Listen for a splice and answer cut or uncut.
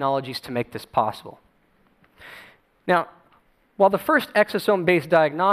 uncut